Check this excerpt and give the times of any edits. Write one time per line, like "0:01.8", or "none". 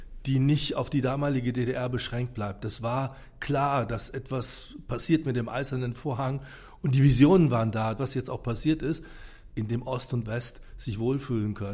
0:08.0
0:09.5